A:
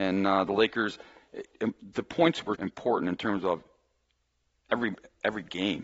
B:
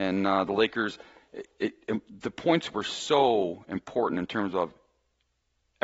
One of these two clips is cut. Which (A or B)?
A